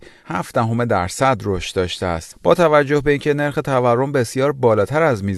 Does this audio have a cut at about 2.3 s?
yes; 1 cut; at 2.3 s

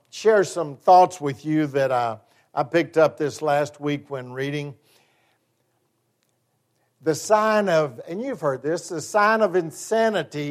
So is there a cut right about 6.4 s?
no; 0 cuts

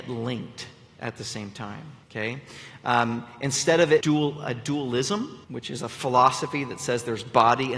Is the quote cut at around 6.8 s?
no; 3 cuts; at 2.0 s, 4.0 s, 5.4 s

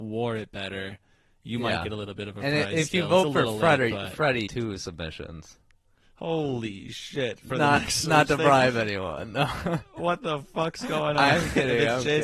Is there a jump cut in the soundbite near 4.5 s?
yes; 1 cut; at 4.5 s

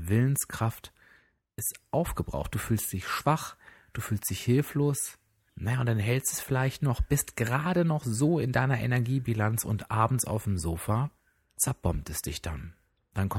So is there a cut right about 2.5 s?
no; 1 cut; at 5.5 s

